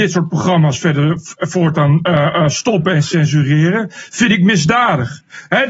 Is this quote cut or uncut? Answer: uncut